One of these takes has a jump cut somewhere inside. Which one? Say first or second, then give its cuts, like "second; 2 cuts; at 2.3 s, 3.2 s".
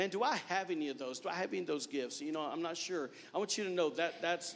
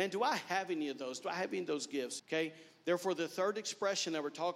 second; 1 cut; at 2.2 s